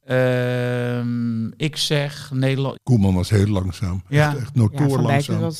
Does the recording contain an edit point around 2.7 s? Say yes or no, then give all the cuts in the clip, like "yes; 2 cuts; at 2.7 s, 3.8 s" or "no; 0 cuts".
yes; 1 cut; at 2.7 s